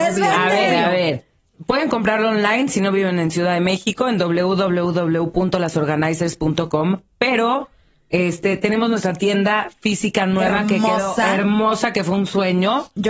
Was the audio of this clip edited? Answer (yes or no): no